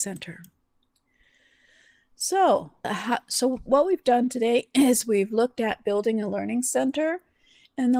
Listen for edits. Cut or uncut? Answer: cut